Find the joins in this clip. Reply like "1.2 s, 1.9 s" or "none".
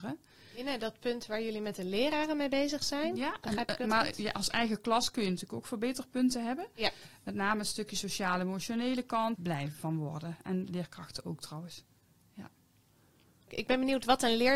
9.3 s

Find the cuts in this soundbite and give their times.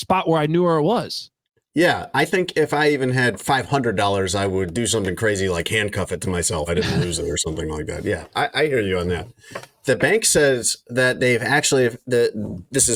6.7 s

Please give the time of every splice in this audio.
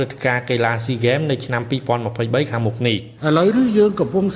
3.2 s

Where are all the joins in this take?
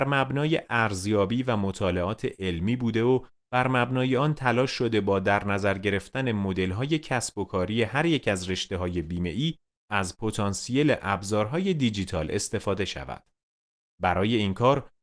none

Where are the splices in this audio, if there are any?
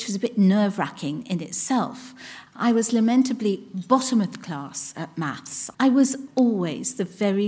2.5 s, 6.3 s

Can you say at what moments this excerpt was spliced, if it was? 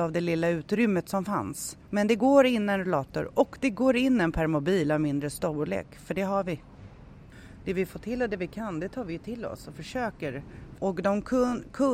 1.8 s, 10.8 s

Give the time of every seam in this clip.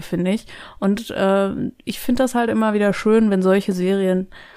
none

